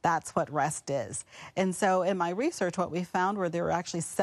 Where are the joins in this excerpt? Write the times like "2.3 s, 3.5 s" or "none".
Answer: none